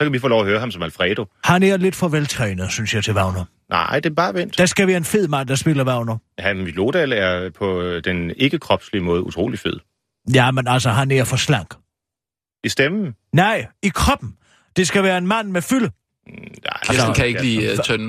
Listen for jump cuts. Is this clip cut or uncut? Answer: uncut